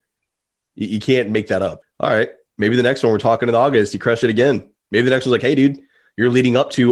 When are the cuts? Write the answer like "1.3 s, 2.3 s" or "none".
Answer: 1.8 s